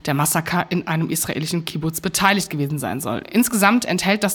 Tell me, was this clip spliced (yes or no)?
no